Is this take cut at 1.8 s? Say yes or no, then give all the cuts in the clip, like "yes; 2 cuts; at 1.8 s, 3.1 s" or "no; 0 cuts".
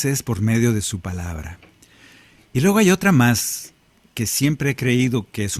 no; 0 cuts